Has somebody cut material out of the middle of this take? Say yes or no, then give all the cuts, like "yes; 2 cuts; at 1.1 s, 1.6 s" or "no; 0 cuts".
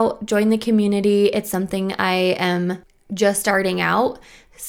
no; 0 cuts